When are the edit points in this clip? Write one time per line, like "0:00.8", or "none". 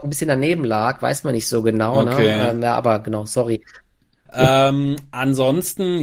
0:04.3